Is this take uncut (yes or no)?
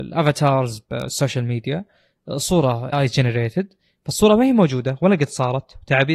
no